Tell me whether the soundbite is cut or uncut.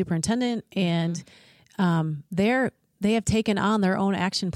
uncut